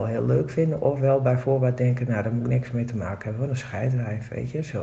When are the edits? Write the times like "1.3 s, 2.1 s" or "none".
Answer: none